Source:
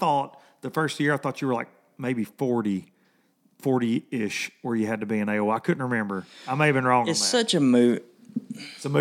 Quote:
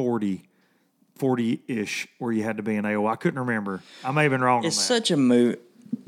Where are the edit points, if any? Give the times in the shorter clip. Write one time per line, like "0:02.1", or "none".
none